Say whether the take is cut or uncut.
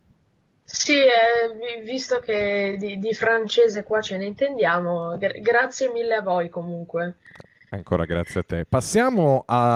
uncut